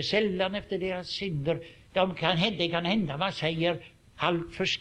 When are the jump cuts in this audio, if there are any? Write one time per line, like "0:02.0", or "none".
0:01.9